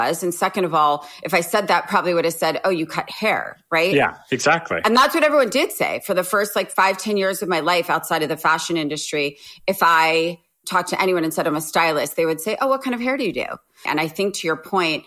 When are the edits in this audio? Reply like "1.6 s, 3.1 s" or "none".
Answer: 13.9 s